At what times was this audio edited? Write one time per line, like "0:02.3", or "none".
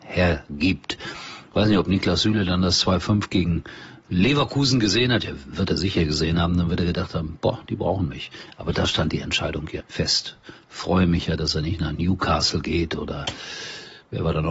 0:09.8